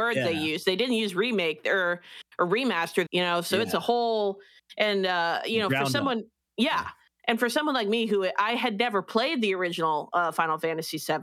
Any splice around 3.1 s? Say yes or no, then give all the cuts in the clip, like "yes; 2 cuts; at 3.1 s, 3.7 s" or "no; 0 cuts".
yes; 1 cut; at 3.1 s